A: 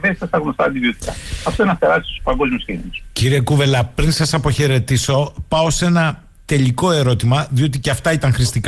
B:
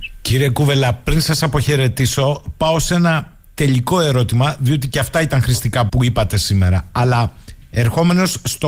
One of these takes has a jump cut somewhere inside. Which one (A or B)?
B